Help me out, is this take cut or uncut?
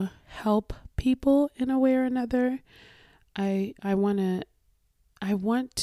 uncut